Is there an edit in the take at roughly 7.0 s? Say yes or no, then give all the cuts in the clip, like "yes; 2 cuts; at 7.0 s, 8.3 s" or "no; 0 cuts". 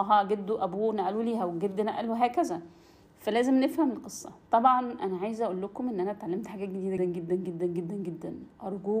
yes; 1 cut; at 7.0 s